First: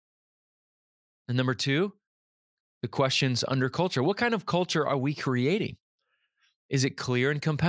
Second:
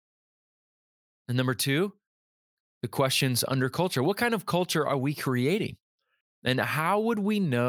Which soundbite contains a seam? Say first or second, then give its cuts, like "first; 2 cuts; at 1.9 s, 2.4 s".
second; 1 cut; at 6.2 s